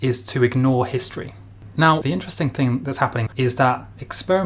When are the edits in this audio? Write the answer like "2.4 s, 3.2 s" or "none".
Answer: 2.0 s, 3.3 s